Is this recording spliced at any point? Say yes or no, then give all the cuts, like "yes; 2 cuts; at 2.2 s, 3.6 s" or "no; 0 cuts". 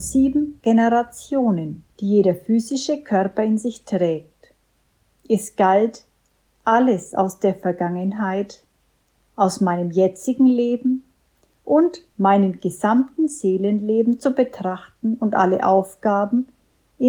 yes; 1 cut; at 1.9 s